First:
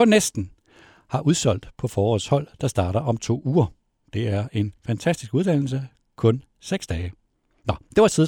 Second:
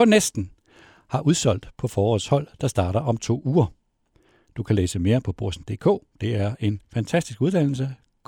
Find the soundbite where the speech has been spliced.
first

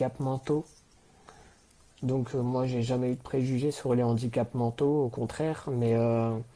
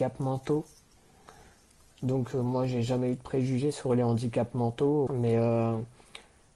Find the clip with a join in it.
second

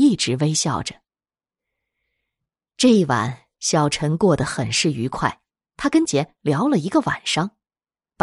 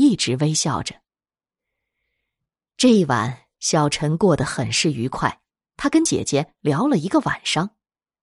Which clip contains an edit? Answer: first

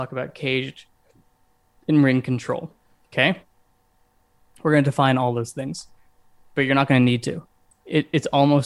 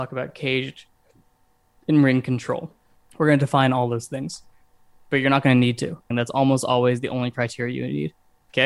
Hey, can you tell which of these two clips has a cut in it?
second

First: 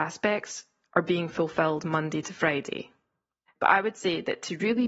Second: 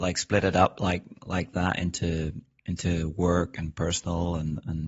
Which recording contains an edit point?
first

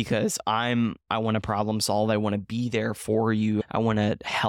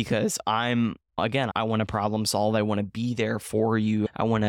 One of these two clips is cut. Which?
first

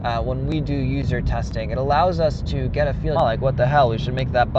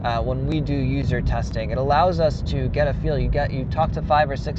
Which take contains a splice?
first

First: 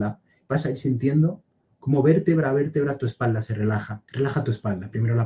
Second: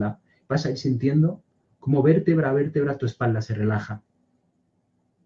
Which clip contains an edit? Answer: first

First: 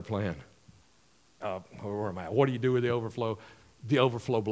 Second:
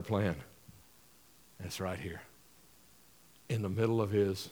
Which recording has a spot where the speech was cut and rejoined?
first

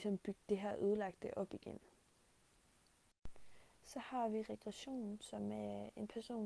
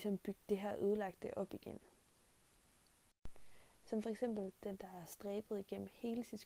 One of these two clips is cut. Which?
second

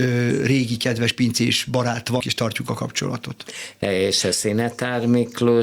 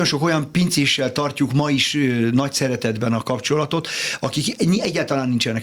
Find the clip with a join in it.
first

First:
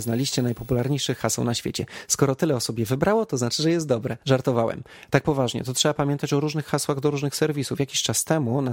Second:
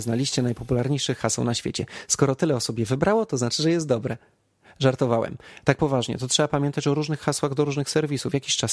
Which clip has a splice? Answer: first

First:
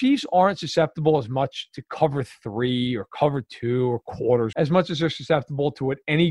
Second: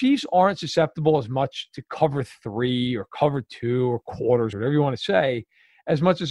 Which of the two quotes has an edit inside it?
first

